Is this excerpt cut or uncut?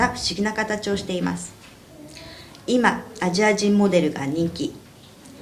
uncut